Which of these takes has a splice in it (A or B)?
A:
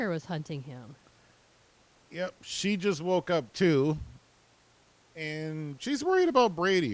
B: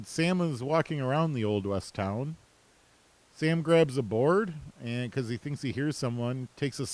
A